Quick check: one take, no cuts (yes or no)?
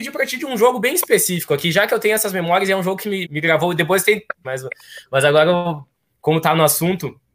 no